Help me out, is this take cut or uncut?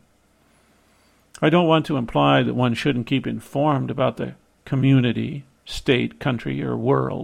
uncut